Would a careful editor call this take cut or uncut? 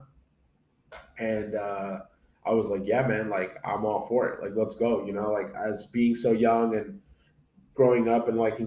uncut